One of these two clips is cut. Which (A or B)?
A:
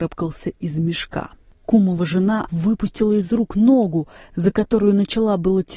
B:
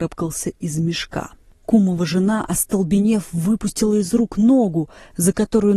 A